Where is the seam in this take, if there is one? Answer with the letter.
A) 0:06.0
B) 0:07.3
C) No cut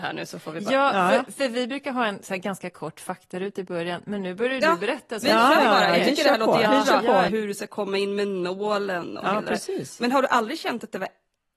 B